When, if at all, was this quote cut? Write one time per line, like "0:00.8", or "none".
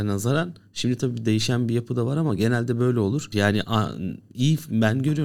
0:03.3